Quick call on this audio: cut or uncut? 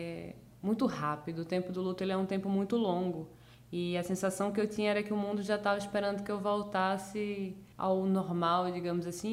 cut